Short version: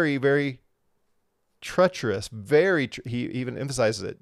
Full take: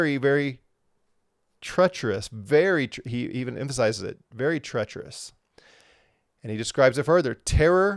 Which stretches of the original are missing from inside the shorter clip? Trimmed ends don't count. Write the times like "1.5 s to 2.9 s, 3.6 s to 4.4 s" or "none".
none